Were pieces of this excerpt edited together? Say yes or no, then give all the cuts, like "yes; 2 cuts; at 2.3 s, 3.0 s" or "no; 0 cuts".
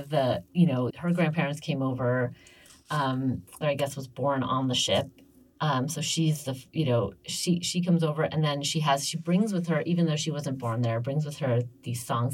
yes; 2 cuts; at 0.9 s, 3.6 s